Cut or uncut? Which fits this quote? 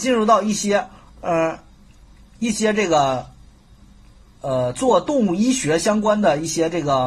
uncut